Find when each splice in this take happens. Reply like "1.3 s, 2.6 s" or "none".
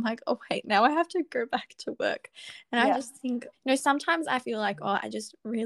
3.5 s